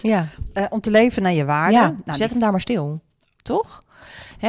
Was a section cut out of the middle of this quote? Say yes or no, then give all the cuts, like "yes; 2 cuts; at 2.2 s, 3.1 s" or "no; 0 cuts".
no; 0 cuts